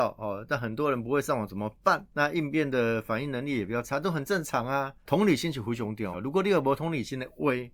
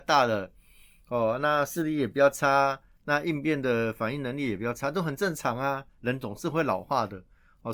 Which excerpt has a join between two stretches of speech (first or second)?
first